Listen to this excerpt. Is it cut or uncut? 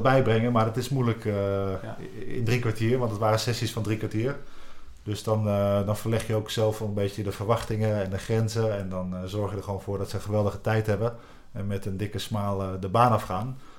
uncut